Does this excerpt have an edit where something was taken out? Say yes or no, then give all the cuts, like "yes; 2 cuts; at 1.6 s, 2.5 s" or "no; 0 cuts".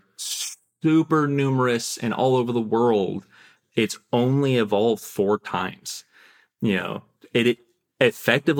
no; 0 cuts